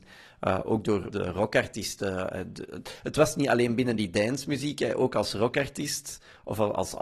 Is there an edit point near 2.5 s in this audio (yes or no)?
no